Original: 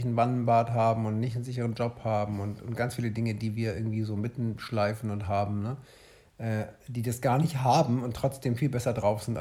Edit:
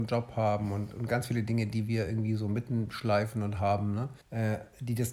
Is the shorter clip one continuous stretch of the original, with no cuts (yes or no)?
no